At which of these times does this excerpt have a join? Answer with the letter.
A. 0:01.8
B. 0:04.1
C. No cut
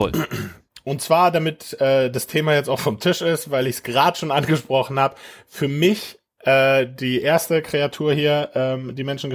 C